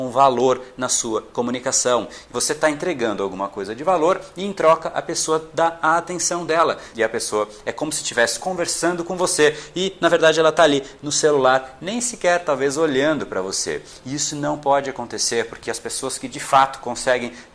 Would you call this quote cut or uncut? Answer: cut